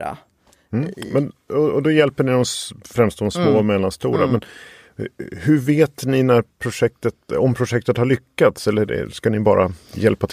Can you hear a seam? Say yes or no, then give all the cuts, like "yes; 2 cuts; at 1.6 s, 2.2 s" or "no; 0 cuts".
no; 0 cuts